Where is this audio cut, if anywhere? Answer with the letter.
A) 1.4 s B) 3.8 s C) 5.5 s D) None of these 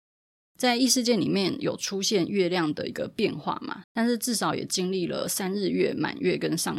B